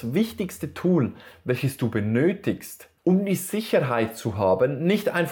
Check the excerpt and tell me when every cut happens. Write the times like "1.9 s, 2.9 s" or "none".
3.0 s